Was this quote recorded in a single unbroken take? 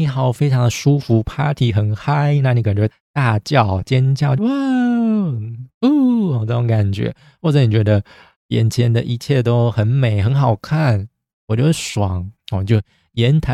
no; 3 cuts; at 2.9 s, 4.4 s, 12.4 s

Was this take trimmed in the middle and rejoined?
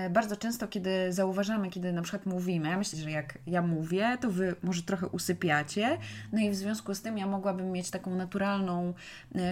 yes; 1 cut; at 2.9 s

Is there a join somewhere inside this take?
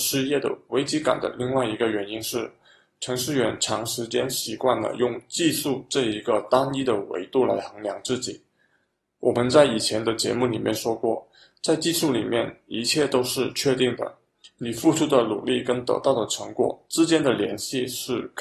no; 0 cuts

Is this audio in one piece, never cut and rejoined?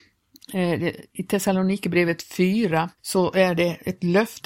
no; 1 cut; at 3.0 s

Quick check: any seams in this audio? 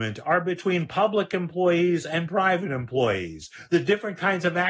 yes; 1 cut; at 3.7 s

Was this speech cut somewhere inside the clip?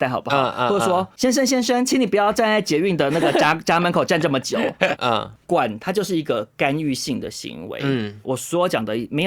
yes; 2 cuts; at 5.0 s, 8.2 s

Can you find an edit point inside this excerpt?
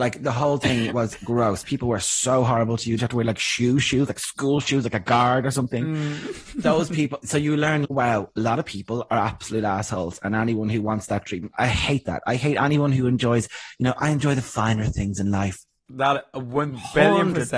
yes; 3 cuts; at 3.0 s, 7.8 s, 15.9 s

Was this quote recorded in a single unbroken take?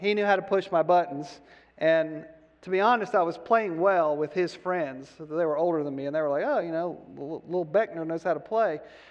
yes; 0 cuts

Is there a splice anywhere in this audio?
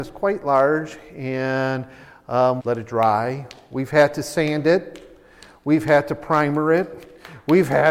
yes; 1 cut; at 2.6 s

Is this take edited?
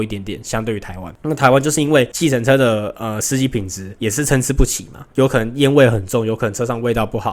no; 0 cuts

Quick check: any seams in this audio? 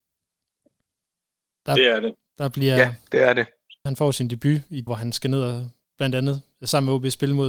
yes; 2 cuts; at 3.9 s, 4.9 s

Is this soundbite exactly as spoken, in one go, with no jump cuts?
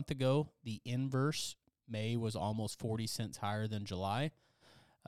yes; 0 cuts

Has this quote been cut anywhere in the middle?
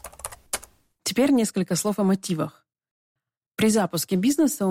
no; 0 cuts

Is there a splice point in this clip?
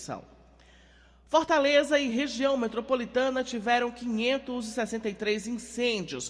no; 0 cuts

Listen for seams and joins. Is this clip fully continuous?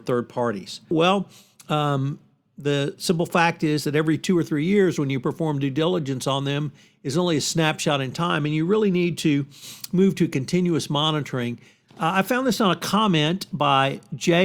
no; 2 cuts; at 0.9 s, 11.8 s

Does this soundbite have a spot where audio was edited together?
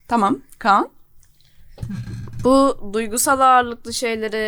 no; 0 cuts

